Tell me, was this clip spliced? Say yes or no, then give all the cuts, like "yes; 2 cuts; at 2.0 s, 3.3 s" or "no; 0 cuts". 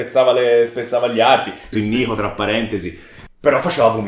yes; 1 cut; at 1.7 s